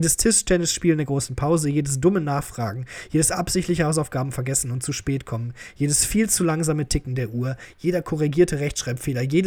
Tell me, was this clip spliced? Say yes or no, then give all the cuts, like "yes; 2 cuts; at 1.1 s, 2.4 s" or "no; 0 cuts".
no; 0 cuts